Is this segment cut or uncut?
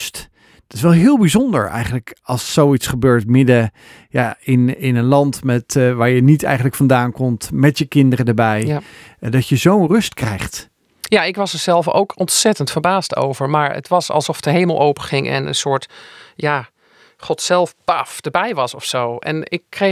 uncut